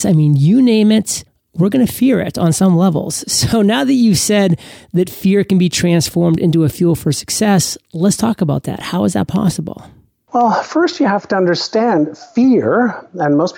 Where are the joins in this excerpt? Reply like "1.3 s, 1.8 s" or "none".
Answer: none